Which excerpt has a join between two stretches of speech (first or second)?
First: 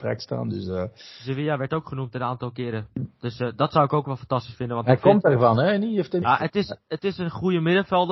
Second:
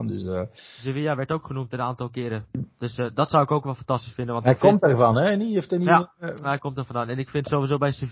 first